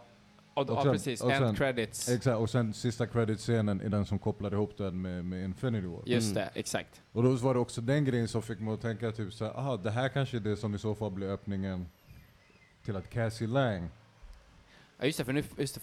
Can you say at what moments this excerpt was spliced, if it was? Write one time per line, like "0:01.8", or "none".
none